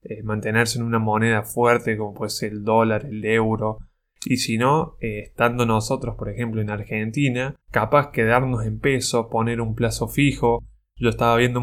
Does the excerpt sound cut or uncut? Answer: cut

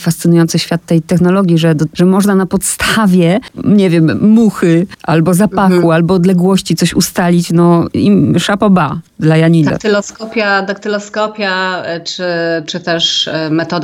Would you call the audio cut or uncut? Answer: cut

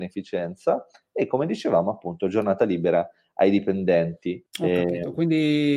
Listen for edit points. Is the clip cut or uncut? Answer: cut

